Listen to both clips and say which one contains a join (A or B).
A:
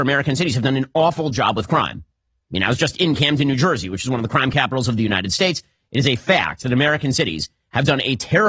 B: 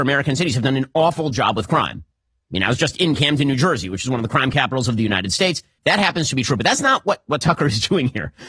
B